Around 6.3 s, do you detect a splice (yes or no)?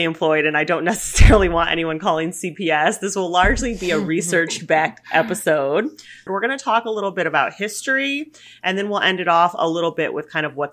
yes